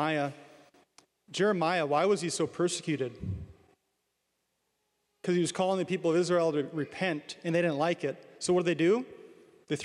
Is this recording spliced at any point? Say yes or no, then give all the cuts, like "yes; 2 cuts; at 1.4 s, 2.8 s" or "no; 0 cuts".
no; 0 cuts